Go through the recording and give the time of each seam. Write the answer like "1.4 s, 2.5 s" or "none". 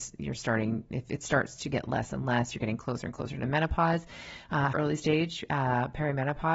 4.7 s